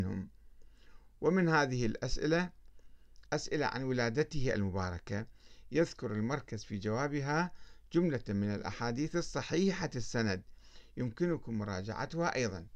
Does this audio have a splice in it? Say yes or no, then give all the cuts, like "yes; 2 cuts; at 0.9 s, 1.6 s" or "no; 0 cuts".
yes; 1 cut; at 3.3 s